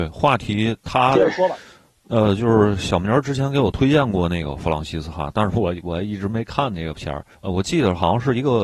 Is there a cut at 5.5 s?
yes; 2 cuts; at 5.5 s, 7.3 s

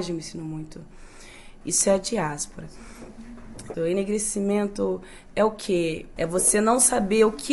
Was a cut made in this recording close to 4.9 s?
no; 3 cuts; at 1.6 s, 3.7 s, 6.2 s

